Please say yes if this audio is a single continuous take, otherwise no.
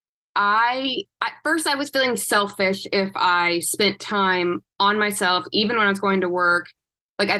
yes